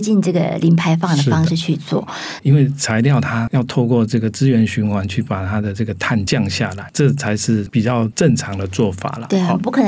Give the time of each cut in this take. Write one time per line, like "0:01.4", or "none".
0:02.4